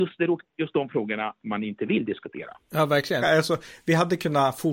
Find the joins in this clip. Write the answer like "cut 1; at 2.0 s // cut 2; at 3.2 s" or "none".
cut 1; at 3.2 s